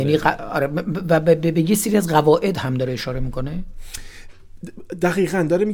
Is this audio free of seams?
yes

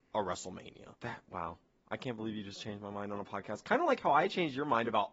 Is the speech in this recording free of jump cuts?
no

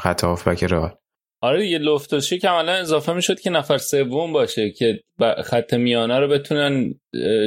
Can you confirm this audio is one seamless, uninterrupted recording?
yes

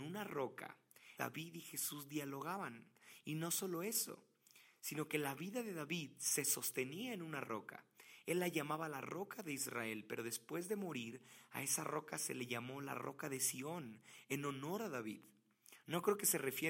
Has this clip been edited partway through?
yes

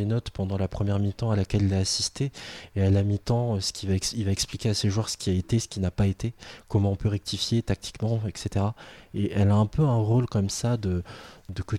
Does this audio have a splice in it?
no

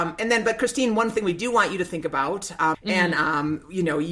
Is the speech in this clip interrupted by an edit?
yes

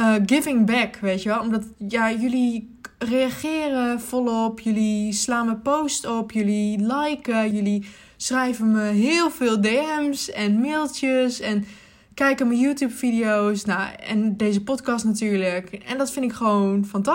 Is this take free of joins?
no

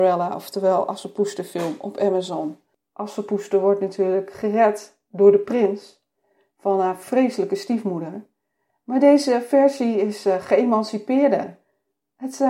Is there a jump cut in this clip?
yes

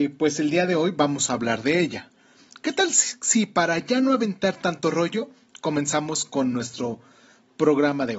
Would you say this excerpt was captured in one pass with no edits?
yes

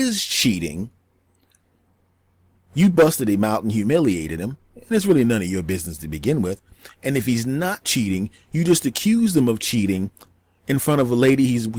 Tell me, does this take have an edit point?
no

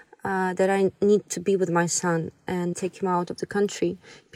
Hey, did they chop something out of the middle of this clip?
yes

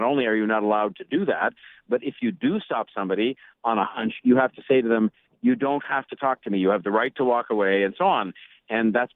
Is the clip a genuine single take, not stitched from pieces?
yes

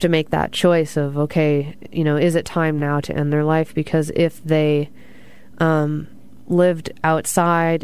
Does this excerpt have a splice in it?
no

